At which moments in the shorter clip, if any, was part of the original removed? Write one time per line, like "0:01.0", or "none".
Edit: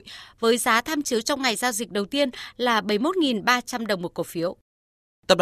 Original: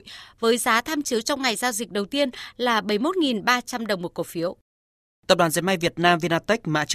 none